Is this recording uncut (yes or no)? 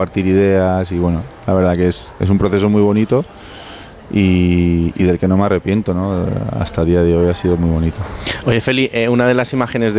yes